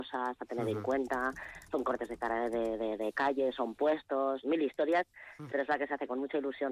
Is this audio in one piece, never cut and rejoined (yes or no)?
no